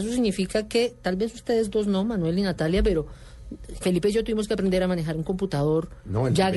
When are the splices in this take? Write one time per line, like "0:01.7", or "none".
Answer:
0:03.8

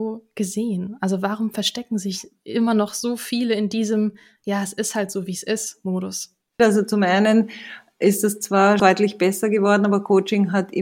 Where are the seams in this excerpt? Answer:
0:06.6
0:08.8

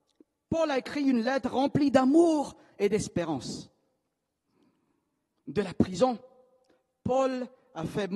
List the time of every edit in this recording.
none

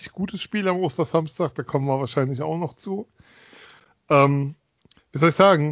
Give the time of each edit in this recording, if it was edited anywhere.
none

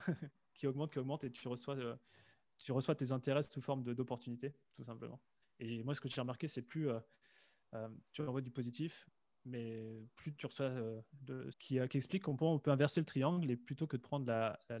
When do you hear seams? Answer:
0:05.4
0:11.5

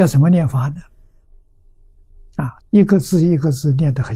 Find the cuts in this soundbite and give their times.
0:02.6

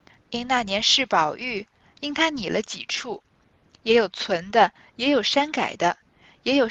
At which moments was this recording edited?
none

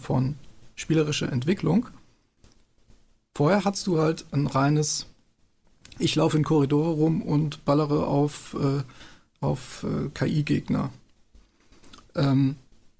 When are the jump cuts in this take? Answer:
none

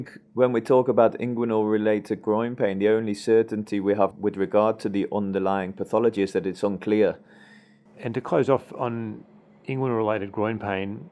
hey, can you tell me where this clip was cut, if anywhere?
0:04.1
0:07.9

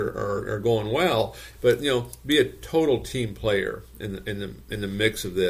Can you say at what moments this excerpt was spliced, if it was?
0:01.5

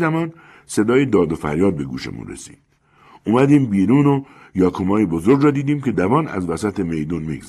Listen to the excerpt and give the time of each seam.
0:05.9

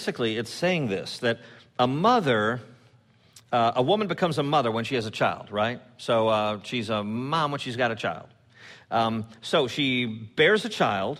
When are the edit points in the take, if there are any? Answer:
none

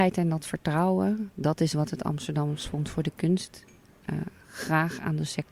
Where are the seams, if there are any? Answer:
none

